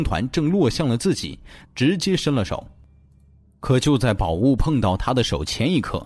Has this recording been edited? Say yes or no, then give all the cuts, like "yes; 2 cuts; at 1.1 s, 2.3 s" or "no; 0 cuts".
yes; 1 cut; at 1.6 s